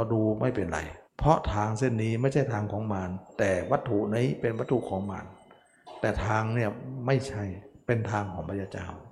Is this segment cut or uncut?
cut